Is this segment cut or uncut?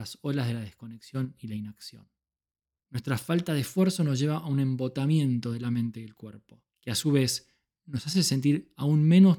cut